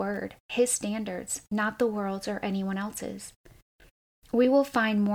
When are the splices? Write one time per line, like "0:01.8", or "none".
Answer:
none